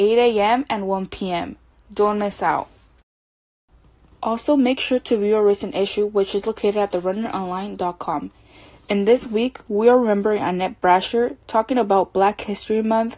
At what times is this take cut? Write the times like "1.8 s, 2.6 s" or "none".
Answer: none